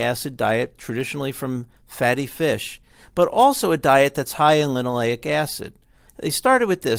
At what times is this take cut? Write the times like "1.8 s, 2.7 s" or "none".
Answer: 6.1 s